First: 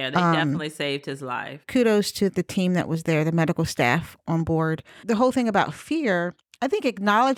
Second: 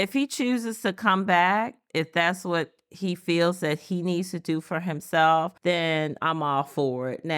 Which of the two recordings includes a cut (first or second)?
second